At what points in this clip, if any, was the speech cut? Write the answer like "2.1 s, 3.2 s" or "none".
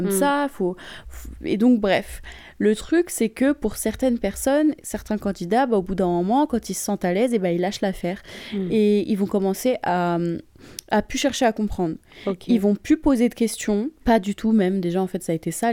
14.0 s